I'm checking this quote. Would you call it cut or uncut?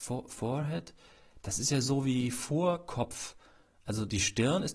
uncut